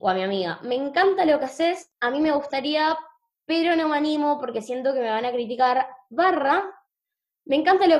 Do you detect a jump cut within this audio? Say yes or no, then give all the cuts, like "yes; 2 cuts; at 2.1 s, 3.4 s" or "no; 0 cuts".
no; 0 cuts